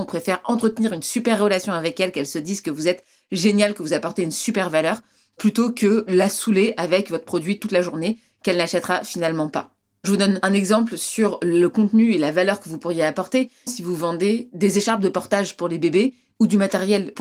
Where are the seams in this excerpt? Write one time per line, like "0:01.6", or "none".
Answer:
0:13.7

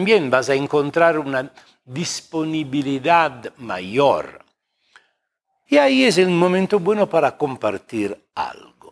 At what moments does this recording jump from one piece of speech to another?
0:05.7

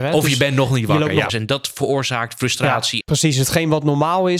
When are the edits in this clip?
0:01.3
0:03.0

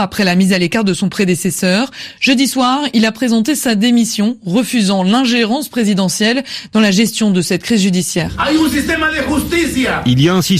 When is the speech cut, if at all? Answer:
none

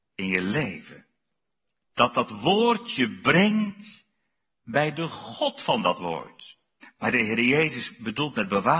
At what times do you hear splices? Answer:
0:06.8

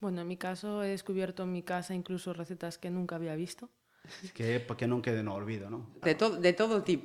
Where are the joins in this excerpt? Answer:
0:04.3
0:06.0

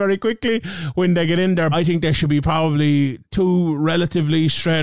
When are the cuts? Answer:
0:01.7

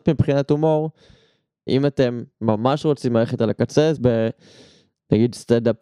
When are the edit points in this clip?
0:01.7
0:03.9

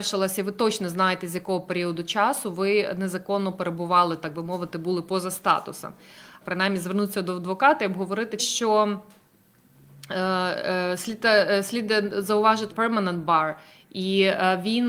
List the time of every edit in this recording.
0:06.4
0:08.4
0:12.7

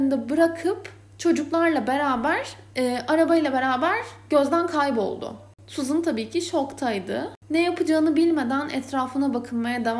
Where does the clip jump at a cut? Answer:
none

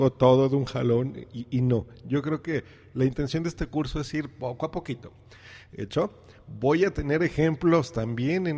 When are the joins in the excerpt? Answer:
none

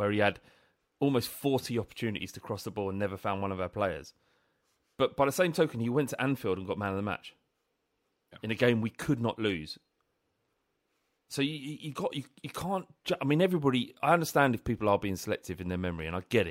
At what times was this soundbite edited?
none

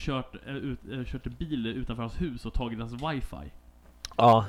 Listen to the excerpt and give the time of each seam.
none

